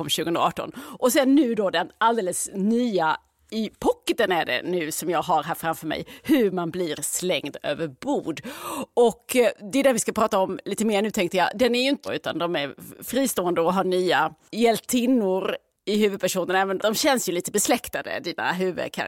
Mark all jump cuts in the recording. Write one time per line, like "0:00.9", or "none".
0:12.0
0:16.8